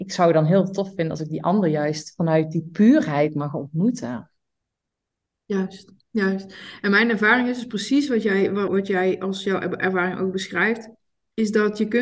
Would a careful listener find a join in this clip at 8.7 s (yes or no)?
yes